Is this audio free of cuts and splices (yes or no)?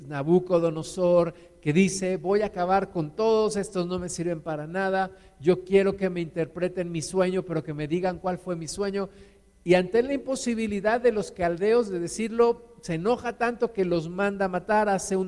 yes